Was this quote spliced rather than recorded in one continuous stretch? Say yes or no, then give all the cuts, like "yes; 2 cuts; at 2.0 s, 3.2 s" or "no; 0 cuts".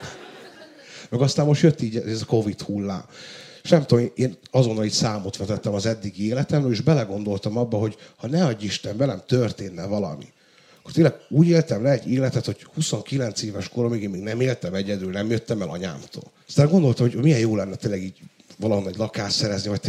yes; 1 cut; at 16.4 s